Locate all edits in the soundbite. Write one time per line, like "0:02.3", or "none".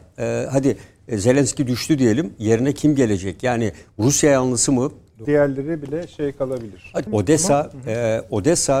0:05.2
0:07.1